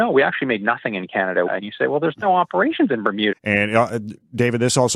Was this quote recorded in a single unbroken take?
no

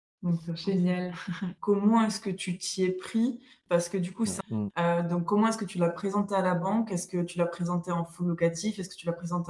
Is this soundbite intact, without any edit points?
no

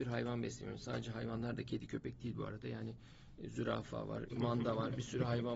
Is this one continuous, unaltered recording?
no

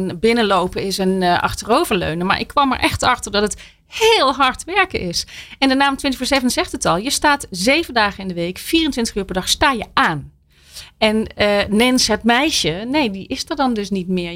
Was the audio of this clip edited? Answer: no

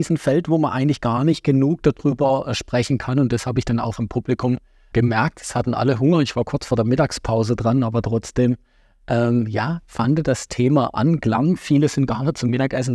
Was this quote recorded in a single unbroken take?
no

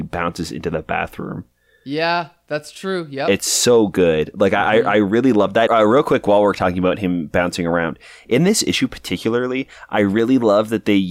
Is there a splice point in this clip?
yes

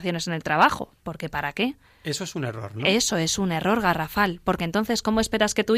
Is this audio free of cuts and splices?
yes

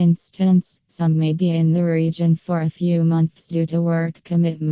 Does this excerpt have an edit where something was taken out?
no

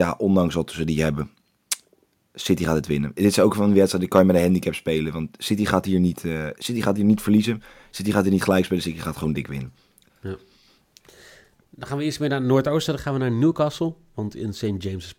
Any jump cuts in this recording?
yes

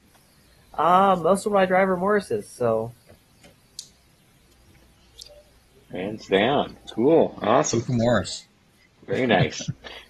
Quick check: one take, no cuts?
yes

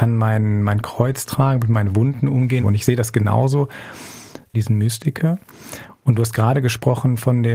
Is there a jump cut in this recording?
yes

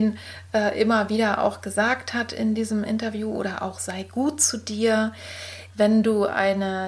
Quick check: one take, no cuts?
no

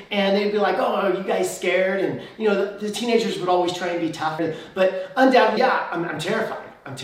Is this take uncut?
no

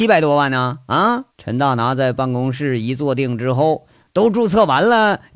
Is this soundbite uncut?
no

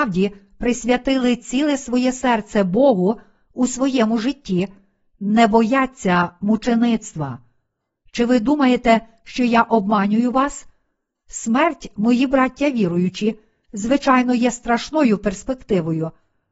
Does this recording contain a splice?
no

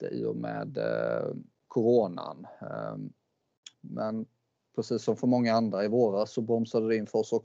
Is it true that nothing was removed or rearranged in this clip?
no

